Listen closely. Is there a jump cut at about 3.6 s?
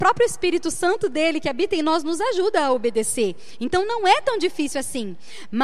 no; 0 cuts

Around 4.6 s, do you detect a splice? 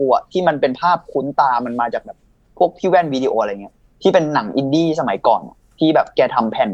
no; 1 cut; at 3.3 s

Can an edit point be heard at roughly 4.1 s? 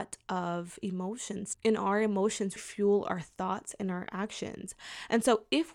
no; 2 cuts; at 1.5 s, 2.6 s

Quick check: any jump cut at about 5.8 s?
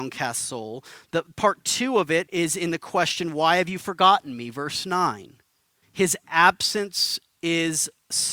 yes; 2 cuts; at 2.3 s, 5.8 s

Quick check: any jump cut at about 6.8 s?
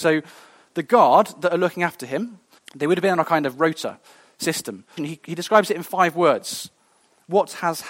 no; 2 cuts; at 2.6 s, 5.0 s

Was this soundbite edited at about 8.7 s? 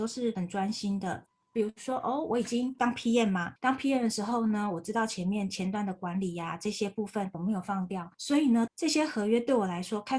yes; 2 cuts; at 7.3 s, 8.7 s

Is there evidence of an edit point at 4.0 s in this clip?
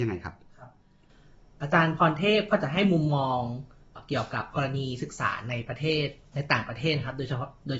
yes; 1 cut; at 4.0 s

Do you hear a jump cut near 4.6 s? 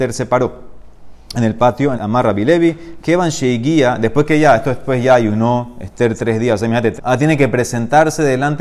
no; 2 cuts; at 1.9 s, 7.0 s

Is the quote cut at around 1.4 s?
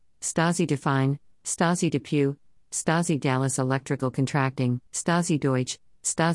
no; 2 cuts; at 2.6 s, 4.9 s

